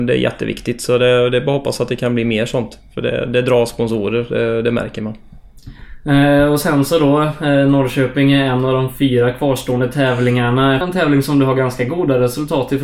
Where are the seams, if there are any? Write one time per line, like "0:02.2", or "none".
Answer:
0:10.8